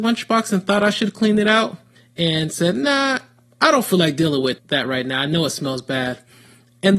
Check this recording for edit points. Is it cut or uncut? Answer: uncut